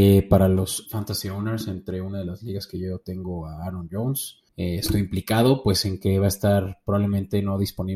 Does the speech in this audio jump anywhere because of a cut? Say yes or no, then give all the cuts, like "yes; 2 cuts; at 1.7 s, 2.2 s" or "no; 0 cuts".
yes; 1 cut; at 4.5 s